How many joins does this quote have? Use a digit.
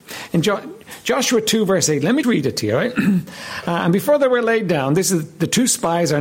1